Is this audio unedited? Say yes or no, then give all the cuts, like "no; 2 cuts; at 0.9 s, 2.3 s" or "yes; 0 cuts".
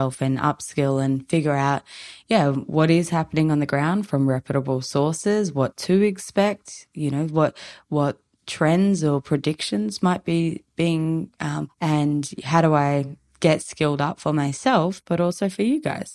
no; 1 cut; at 11.7 s